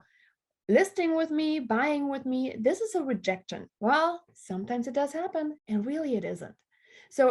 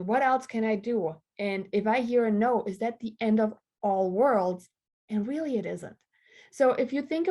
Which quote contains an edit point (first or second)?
first